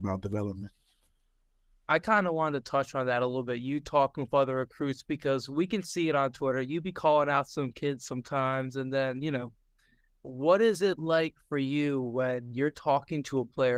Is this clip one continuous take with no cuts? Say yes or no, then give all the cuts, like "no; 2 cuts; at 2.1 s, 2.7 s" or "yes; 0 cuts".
yes; 0 cuts